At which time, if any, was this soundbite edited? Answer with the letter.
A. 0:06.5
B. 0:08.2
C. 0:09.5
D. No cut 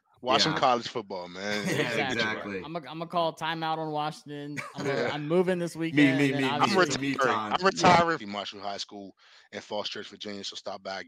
B